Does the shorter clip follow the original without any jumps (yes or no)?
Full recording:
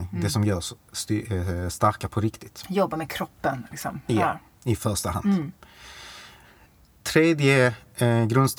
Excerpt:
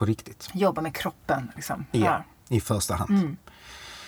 yes